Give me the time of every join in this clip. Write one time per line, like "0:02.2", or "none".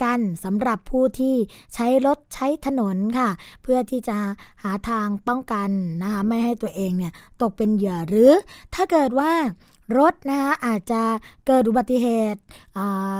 none